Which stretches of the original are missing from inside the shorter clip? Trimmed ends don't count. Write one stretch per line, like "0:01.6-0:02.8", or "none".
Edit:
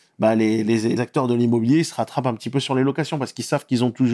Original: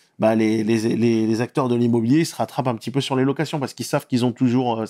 0:01.0-0:01.4